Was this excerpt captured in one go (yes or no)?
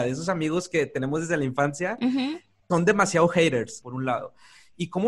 no